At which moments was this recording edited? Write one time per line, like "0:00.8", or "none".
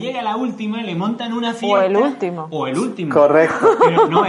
none